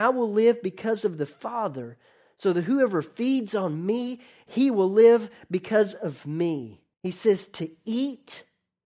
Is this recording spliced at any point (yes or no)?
yes